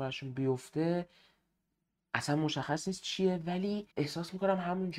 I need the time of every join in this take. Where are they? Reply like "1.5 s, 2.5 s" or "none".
3.9 s